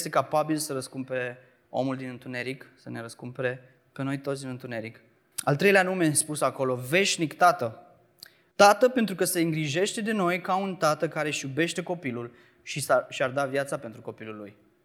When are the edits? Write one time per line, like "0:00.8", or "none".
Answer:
0:05.3
0:08.5